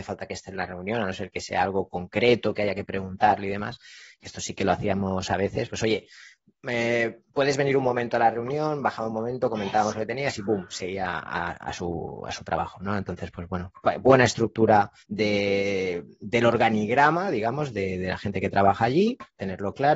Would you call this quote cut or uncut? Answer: cut